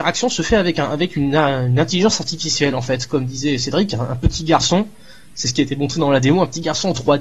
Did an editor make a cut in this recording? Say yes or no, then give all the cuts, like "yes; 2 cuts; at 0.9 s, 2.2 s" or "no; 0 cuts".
no; 0 cuts